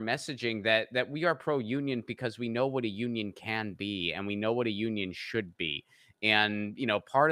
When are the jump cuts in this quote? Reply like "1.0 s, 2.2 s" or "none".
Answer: none